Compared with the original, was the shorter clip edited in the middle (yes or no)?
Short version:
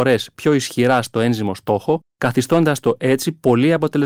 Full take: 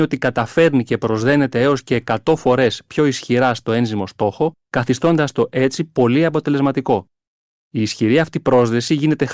no